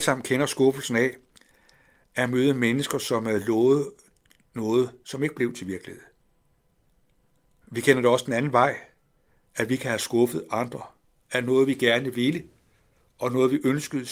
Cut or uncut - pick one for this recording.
uncut